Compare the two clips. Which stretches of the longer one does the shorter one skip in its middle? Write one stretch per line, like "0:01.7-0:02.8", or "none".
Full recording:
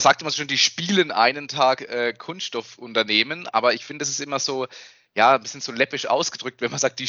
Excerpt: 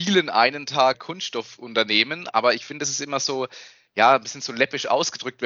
0:01.8-0:02.1